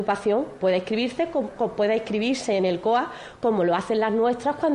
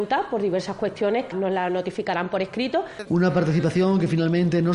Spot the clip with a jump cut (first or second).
second